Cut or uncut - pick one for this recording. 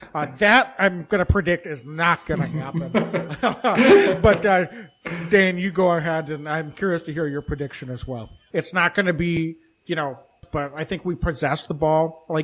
cut